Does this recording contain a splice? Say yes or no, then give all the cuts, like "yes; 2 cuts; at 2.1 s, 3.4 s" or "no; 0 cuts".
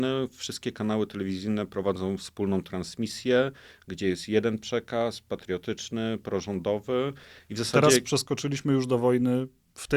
no; 0 cuts